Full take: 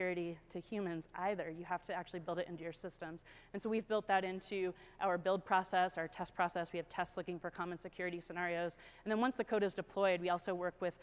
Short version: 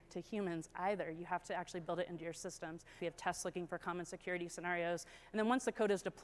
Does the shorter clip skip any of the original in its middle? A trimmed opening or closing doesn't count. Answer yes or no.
yes